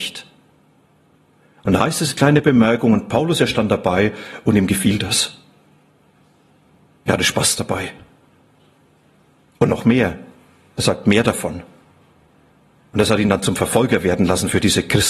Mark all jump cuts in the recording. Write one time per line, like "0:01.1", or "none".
none